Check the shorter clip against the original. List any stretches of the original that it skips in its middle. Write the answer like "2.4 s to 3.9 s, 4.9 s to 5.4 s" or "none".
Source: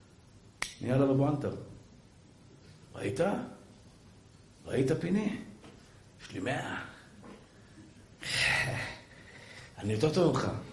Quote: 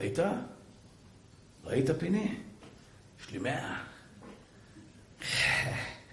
none